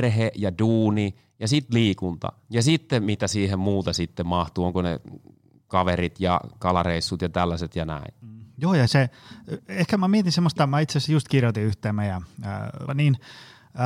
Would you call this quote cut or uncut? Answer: cut